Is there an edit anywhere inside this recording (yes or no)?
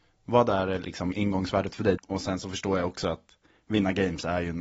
yes